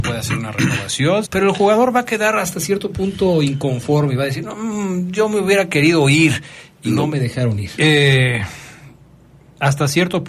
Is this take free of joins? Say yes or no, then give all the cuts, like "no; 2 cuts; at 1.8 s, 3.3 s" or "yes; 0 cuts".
no; 2 cuts; at 1.2 s, 7.8 s